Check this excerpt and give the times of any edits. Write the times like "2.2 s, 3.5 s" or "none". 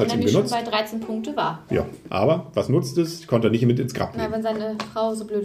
none